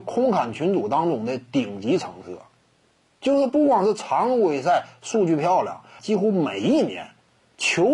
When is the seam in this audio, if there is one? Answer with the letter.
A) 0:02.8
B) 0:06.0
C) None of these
B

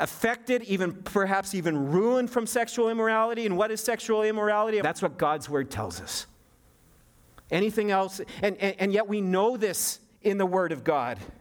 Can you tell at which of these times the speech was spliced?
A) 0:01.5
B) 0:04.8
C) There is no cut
B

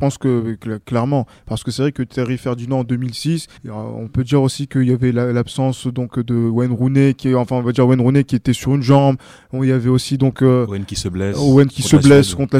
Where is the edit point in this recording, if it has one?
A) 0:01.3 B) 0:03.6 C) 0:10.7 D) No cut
B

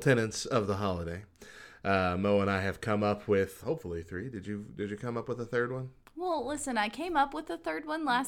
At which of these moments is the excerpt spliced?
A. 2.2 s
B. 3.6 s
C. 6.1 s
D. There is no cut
B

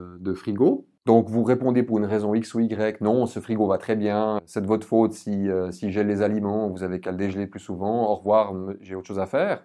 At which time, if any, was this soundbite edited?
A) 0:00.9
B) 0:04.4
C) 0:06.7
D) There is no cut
B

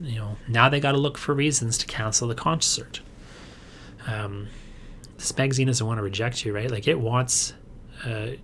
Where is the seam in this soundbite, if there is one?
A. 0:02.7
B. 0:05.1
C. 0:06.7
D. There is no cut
B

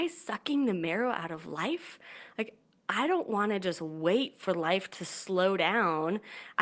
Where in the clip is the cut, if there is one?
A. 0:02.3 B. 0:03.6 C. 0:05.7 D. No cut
D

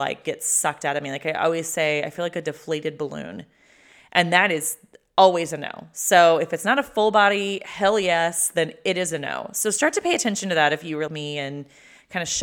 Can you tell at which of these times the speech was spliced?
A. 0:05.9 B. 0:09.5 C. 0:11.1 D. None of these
C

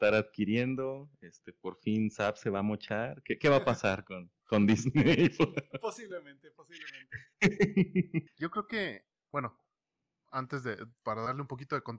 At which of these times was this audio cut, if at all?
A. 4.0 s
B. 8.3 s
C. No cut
B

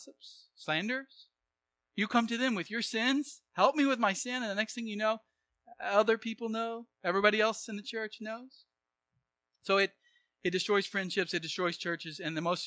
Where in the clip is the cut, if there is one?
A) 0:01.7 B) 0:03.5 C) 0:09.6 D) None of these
D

